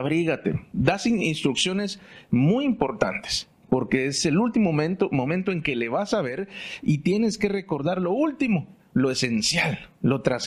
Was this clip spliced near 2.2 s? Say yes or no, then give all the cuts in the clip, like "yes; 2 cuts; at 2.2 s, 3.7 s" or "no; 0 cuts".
no; 0 cuts